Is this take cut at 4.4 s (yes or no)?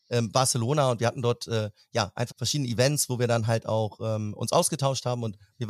no